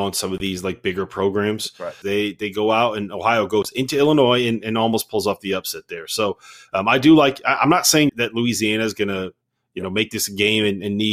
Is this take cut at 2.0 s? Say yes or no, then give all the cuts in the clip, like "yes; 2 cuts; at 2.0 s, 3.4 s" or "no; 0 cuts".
yes; 2 cuts; at 2.0 s, 8.1 s